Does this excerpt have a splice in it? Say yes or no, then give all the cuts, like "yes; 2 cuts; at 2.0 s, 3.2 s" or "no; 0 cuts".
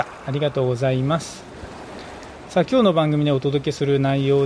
no; 0 cuts